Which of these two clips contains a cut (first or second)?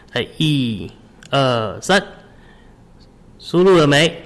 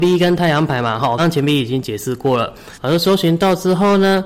second